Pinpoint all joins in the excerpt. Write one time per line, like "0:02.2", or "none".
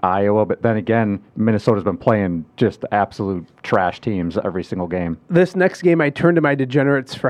0:01.3

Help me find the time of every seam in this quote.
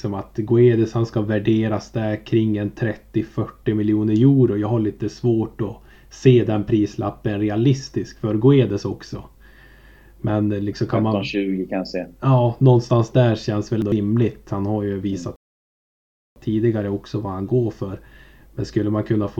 none

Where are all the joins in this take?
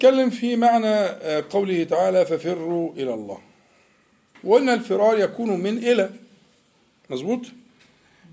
0:04.4

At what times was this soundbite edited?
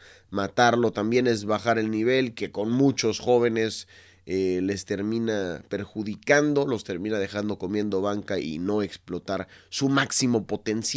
none

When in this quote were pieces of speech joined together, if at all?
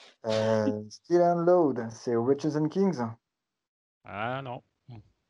none

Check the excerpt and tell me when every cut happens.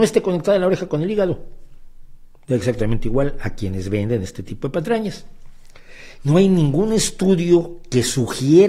0:06.2

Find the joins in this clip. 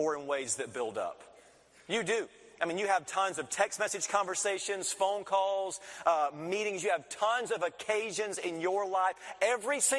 none

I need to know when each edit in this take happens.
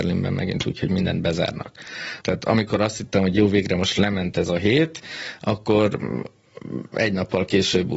0:02.2

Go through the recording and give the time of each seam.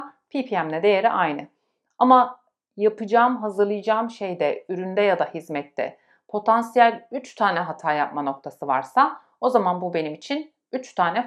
none

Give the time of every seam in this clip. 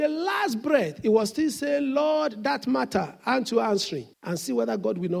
0:04.1

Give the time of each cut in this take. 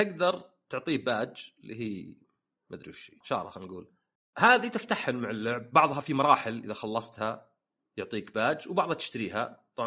0:03.2

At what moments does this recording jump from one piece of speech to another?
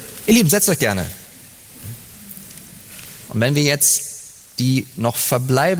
0:03.3

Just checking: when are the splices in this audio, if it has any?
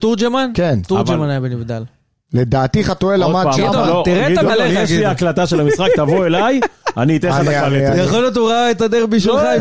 0:04.5

